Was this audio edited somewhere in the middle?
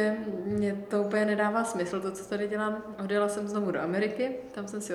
no; 0 cuts

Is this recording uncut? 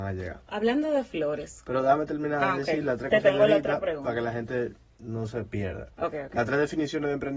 yes; 0 cuts

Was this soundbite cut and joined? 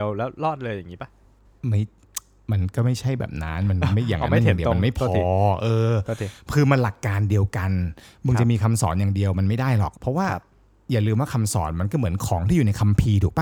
yes; 1 cut; at 10.0 s

